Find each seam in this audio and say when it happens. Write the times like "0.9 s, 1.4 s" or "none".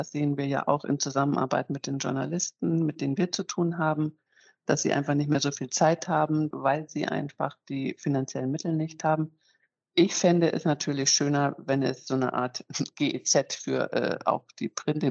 6.5 s, 9.8 s